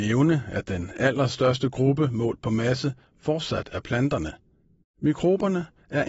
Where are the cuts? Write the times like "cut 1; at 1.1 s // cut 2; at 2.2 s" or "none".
cut 1; at 4.8 s